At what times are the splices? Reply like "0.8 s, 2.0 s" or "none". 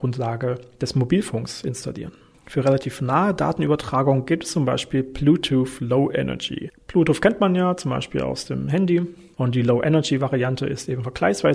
2.3 s